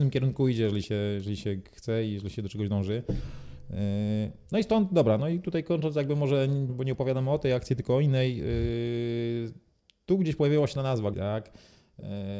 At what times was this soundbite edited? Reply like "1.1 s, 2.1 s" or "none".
6.7 s, 11.1 s